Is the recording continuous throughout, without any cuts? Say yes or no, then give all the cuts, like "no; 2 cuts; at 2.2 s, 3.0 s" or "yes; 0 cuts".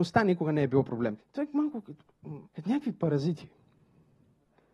no; 2 cuts; at 1.2 s, 2.5 s